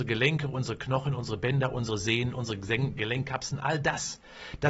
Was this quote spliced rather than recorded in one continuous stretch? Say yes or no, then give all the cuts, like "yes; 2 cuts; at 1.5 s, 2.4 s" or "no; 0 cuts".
no; 0 cuts